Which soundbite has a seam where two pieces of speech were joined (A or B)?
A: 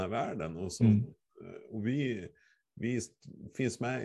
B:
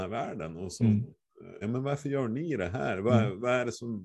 B